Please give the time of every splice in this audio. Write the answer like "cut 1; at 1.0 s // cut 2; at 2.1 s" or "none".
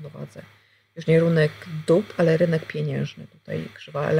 cut 1; at 2.2 s